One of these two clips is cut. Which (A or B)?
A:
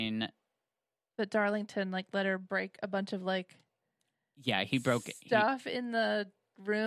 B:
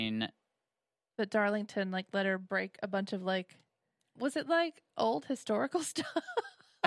B